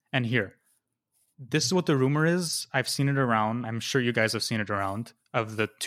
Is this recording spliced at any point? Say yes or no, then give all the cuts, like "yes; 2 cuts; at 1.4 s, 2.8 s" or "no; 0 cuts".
no; 0 cuts